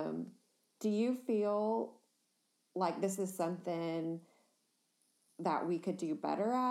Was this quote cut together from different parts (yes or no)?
no